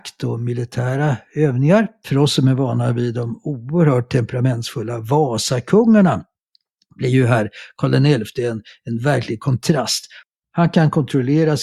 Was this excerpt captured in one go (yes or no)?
no